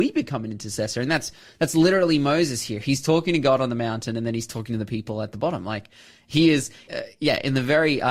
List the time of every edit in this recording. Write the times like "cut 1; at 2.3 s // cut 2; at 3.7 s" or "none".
cut 1; at 6.9 s